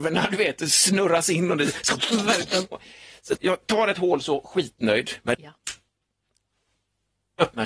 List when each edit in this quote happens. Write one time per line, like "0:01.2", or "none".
0:03.4
0:05.3